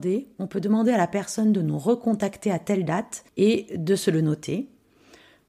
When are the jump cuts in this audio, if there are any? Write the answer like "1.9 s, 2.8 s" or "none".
3.3 s